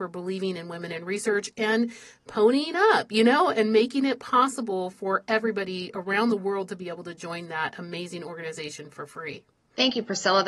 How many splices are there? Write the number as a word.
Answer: zero